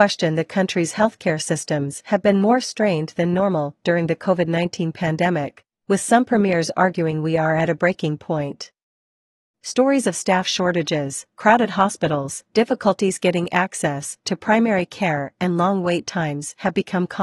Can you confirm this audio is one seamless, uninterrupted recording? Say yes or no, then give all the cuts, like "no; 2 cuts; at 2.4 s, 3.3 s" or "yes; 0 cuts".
yes; 0 cuts